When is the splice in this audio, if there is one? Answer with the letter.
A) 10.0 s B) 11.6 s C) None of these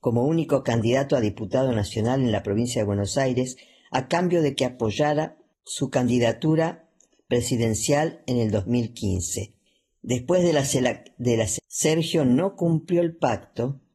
B